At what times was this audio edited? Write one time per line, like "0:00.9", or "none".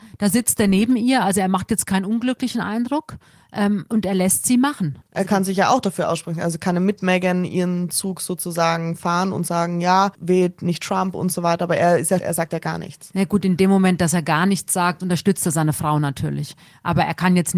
0:10.1
0:12.2